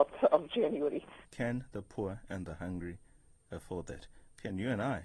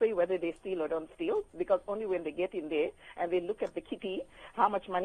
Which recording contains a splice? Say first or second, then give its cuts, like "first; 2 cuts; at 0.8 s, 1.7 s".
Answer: first; 1 cut; at 1.2 s